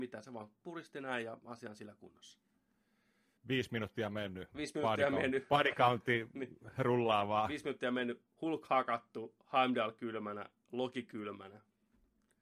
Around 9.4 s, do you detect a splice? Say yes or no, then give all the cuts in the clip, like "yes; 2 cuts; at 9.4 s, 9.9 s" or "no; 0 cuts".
no; 1 cut; at 3.4 s